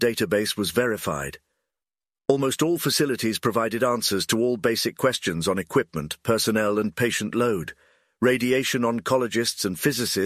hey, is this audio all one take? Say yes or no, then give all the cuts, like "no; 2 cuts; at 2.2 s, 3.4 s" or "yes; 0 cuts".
yes; 0 cuts